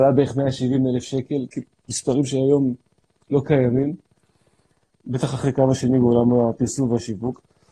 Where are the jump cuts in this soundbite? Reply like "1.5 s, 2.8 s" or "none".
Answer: 4.9 s